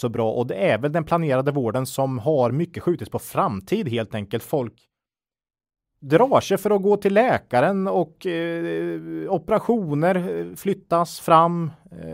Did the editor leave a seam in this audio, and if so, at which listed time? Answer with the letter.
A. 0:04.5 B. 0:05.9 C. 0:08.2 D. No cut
D